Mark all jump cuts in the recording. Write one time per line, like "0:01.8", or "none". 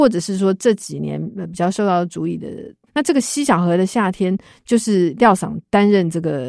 0:02.9